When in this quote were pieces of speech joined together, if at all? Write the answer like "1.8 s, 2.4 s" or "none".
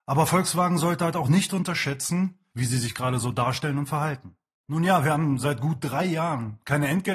2.5 s, 4.6 s